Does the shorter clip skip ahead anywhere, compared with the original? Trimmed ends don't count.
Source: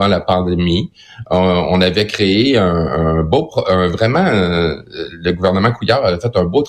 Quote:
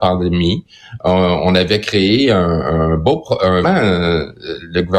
yes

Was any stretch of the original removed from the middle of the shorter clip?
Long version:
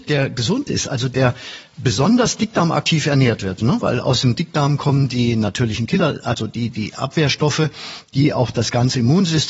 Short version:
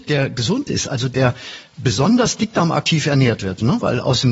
no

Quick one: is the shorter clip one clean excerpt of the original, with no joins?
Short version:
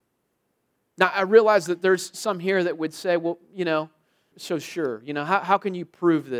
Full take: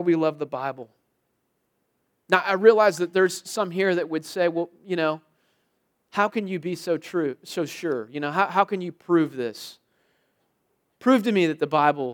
no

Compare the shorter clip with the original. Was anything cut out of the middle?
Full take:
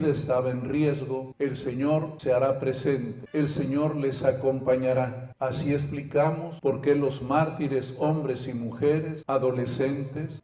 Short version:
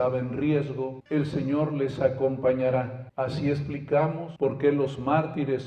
yes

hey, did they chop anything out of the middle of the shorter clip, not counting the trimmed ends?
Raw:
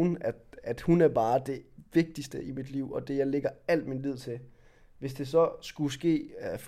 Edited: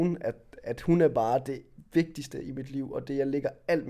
no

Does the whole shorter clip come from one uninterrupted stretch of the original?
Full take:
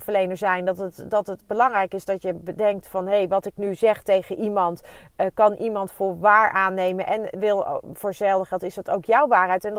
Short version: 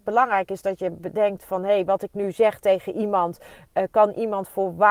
yes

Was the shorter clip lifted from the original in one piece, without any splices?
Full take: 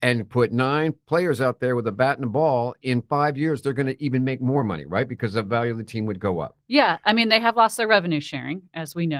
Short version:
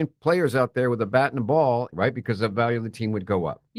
no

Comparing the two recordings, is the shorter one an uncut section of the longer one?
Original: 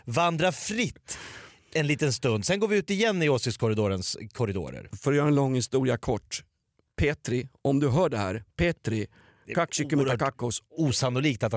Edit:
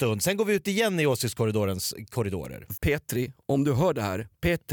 no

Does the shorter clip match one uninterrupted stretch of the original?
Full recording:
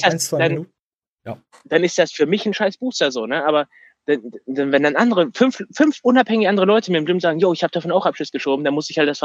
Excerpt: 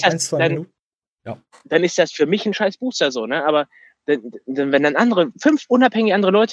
no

